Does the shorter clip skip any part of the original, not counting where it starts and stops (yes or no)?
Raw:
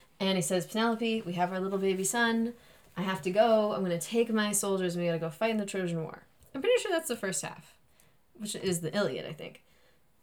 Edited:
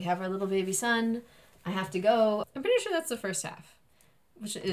yes